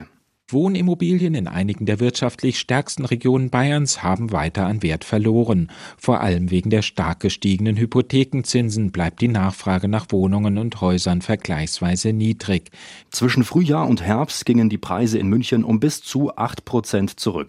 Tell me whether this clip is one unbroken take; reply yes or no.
no